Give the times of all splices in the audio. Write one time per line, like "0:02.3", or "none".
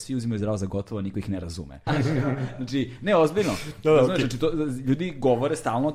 0:01.9